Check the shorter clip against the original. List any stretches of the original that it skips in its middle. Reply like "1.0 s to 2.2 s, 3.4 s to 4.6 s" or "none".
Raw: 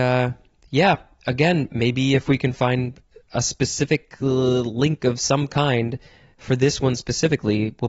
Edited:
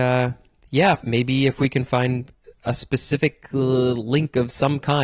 1.0 s to 1.7 s